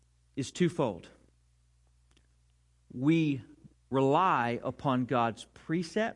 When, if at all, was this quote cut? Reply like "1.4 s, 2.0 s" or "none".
none